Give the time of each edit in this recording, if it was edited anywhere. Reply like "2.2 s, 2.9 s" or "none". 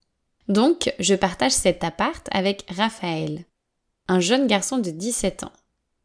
none